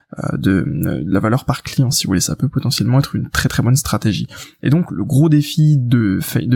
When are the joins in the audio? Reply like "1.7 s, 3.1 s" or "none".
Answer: none

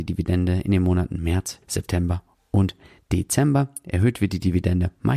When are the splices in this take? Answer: 1.6 s

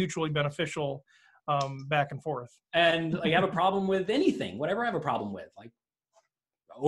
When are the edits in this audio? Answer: 2.6 s

